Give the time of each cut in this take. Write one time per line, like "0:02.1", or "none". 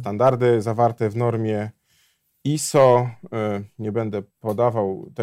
0:04.3

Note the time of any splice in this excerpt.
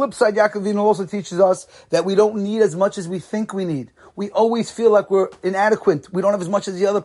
none

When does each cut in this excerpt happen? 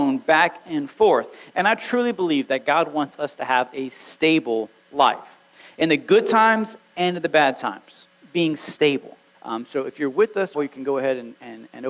0:09.3
0:10.5

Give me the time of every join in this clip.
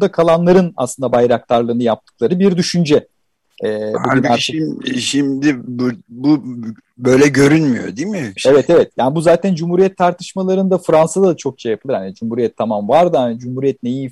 0:08.4

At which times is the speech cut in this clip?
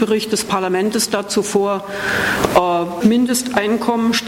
0:03.0

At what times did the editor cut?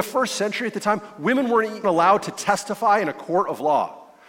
0:01.8

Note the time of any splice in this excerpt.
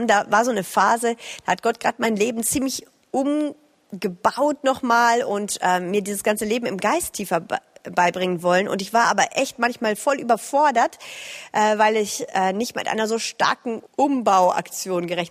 0:13.9

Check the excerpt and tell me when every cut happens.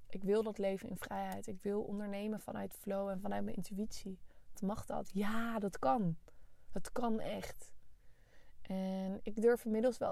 0:04.5

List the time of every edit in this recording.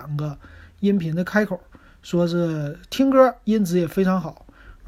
none

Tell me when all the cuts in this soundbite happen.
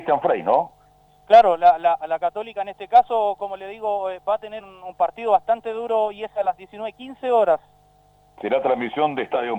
0:01.1
0:04.6

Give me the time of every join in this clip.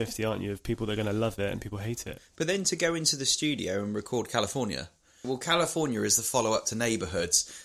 0:05.2

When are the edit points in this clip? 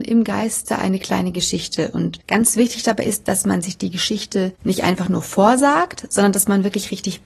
none

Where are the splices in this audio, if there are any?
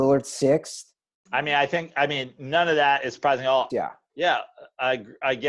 0:01.3
0:03.7

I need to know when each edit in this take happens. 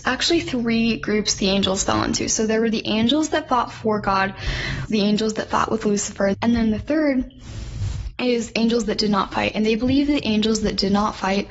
0:04.9
0:06.3

